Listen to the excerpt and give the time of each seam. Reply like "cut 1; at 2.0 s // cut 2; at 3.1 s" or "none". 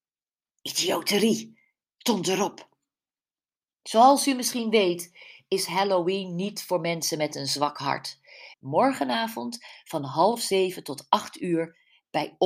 cut 1; at 8.5 s